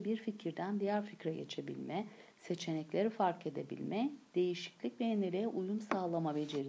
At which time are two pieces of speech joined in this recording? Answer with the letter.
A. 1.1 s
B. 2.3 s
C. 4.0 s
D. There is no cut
D